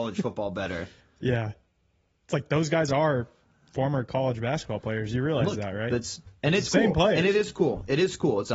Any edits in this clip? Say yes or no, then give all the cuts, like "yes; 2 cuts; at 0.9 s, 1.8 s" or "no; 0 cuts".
no; 0 cuts